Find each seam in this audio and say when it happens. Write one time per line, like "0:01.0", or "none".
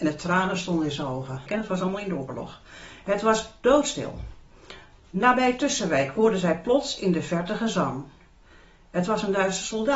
0:01.5